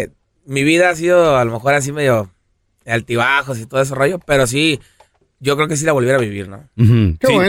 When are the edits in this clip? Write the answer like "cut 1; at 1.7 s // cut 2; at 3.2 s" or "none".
none